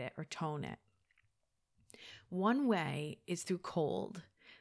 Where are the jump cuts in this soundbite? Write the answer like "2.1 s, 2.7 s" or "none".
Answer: none